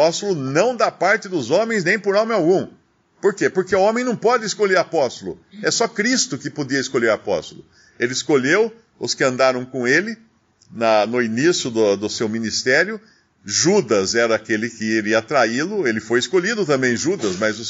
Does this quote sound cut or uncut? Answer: uncut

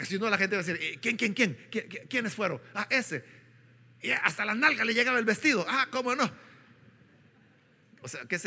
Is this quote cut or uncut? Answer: uncut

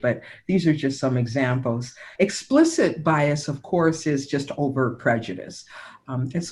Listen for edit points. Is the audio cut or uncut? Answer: uncut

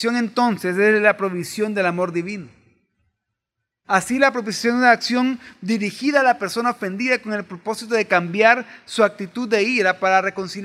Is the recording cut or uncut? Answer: cut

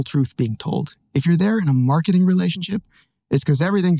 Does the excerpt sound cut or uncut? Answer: uncut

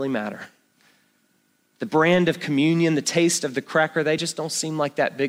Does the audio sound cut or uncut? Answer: uncut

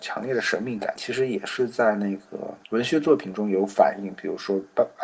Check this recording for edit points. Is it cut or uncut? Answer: cut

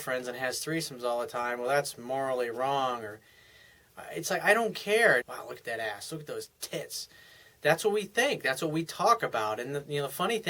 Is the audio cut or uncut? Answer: cut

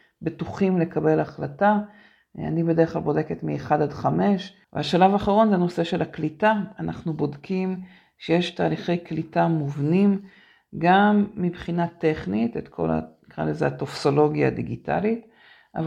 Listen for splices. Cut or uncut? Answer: cut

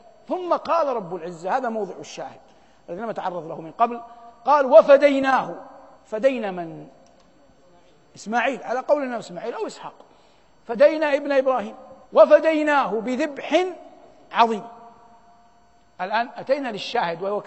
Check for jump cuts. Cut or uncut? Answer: cut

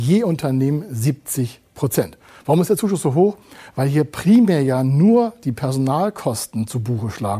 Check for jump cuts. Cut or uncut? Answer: uncut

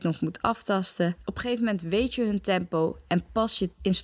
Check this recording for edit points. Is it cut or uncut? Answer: uncut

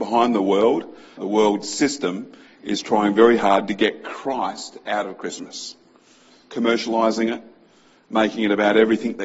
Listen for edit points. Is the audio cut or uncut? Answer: cut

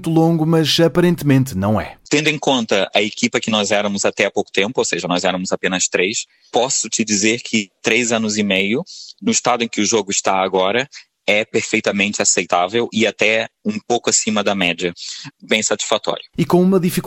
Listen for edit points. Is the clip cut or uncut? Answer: cut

